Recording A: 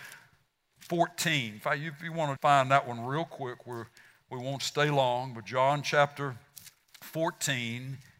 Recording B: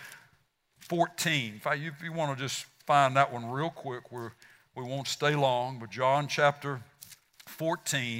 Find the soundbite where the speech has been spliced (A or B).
A